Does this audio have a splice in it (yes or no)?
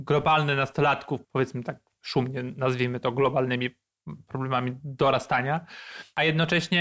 yes